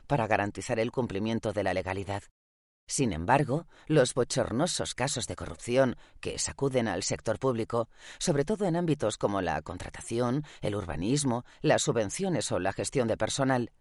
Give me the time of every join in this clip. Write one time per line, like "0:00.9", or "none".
none